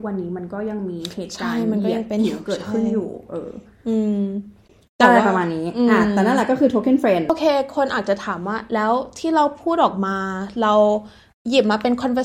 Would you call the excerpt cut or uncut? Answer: uncut